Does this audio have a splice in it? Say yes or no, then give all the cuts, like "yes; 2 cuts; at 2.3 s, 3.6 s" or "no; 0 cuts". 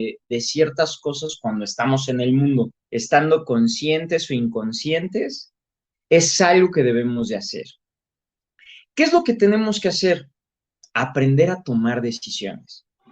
yes; 1 cut; at 2.8 s